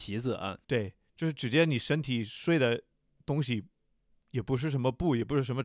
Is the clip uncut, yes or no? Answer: yes